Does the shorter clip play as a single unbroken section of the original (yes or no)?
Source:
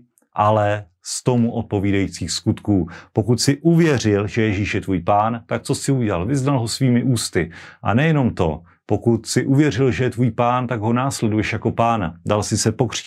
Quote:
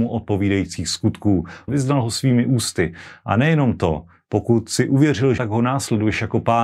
no